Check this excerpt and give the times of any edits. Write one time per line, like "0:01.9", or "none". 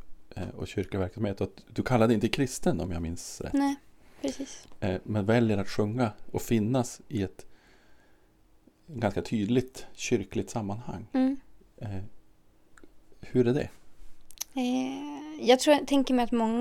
none

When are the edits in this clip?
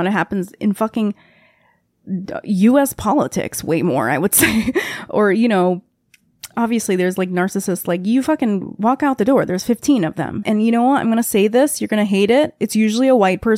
0:10.4

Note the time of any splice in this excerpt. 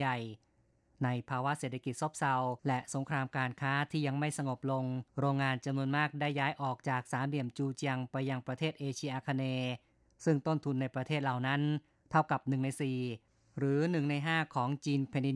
0:02.6
0:05.1

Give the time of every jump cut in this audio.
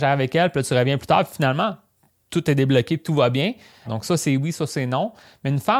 0:03.9

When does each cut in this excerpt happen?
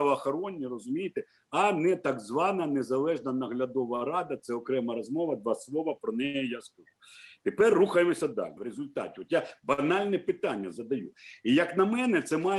0:08.6

